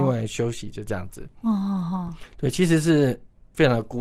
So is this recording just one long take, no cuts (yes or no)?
yes